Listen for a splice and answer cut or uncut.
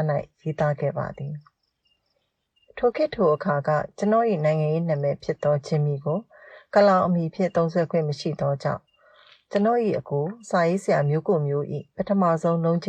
uncut